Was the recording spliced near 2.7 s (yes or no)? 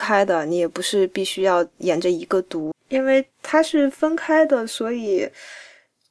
yes